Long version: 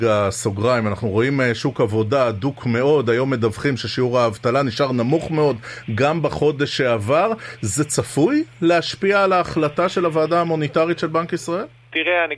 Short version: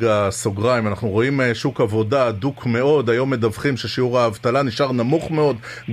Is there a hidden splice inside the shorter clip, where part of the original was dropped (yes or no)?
no